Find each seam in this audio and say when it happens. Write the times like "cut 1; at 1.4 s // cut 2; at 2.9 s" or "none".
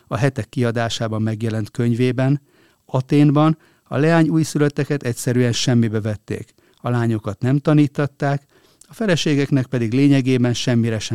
none